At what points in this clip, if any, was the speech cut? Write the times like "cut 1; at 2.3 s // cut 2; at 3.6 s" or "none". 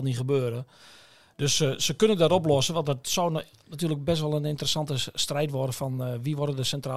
none